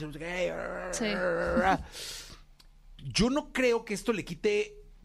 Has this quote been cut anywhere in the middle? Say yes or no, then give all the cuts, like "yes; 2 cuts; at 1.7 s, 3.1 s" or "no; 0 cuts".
no; 0 cuts